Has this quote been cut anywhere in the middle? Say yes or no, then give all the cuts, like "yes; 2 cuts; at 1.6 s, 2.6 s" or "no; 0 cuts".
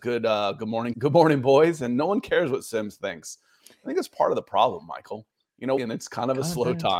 yes; 2 cuts; at 0.9 s, 5.8 s